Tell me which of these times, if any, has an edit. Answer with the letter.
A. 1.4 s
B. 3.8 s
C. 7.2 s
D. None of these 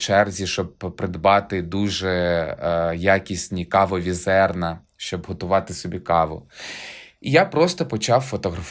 D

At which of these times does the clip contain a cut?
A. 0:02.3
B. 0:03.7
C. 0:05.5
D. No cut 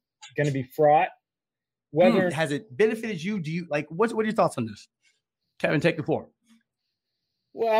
A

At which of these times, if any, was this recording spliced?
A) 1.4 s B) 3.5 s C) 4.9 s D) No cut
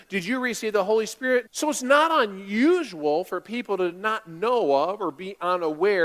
A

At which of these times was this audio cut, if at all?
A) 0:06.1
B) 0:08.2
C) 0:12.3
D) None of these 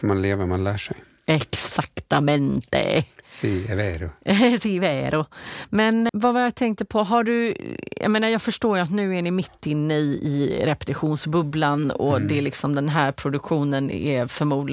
A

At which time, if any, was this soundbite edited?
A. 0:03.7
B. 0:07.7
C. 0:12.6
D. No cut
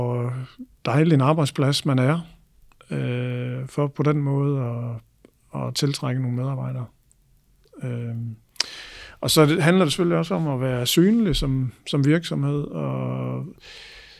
B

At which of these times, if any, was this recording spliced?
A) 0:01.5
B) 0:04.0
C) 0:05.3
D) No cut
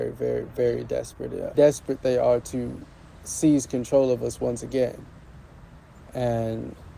A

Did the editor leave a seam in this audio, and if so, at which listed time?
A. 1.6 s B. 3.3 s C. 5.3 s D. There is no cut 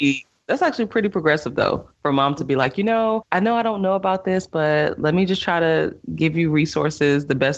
D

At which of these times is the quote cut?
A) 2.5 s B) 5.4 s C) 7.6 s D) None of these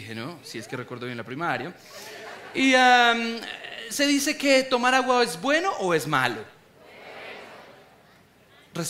D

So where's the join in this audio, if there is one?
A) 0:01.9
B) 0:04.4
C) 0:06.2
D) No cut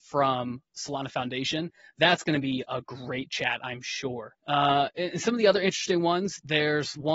B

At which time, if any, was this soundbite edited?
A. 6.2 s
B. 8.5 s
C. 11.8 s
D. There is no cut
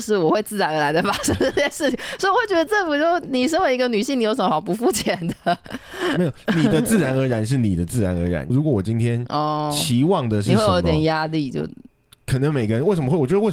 B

